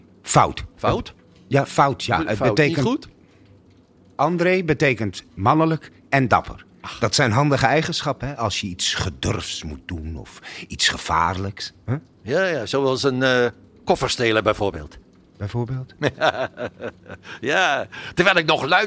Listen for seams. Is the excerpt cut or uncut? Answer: uncut